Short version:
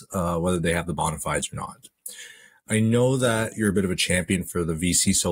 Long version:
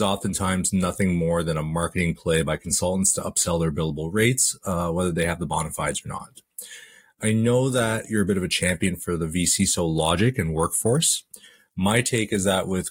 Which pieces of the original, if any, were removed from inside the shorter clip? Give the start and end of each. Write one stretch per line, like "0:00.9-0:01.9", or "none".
none